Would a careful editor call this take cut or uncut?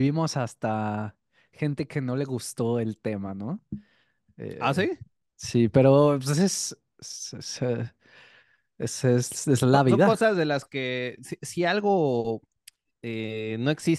uncut